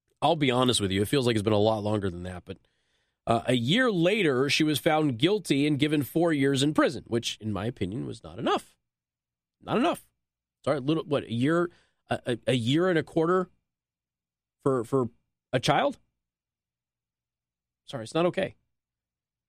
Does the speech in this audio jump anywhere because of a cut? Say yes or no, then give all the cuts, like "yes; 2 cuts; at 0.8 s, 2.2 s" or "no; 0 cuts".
no; 0 cuts